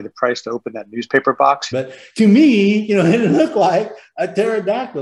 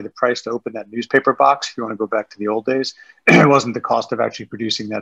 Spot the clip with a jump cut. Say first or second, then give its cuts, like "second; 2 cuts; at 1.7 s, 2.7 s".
first; 1 cut; at 1.7 s